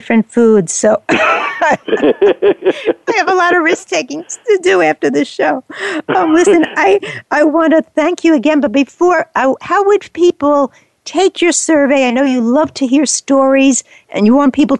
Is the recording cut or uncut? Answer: uncut